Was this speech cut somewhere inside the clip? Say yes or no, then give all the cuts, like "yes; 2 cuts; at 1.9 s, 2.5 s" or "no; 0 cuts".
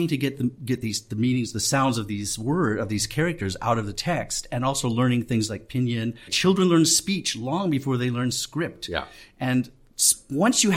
yes; 1 cut; at 6.3 s